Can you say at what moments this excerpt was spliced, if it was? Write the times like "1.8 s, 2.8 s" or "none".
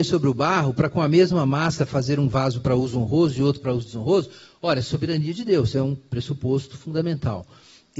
none